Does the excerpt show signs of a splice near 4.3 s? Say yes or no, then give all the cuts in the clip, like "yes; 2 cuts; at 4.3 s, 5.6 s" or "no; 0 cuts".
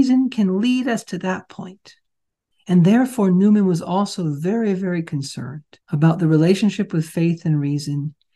no; 2 cuts; at 2.5 s, 5.8 s